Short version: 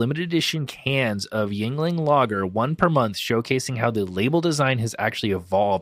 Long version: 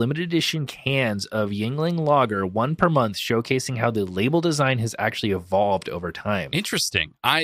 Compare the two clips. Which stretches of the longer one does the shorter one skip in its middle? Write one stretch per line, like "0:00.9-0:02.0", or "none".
none